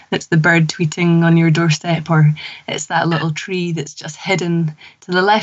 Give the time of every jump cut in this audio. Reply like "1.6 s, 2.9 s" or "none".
none